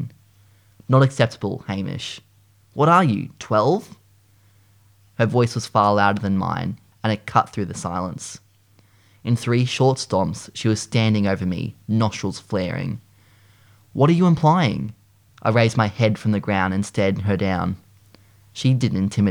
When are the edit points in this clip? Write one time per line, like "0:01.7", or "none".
0:06.9
0:15.3